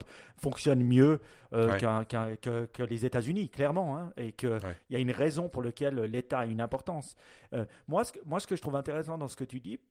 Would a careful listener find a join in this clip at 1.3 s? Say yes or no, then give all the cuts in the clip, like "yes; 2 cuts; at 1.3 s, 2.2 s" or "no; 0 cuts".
no; 0 cuts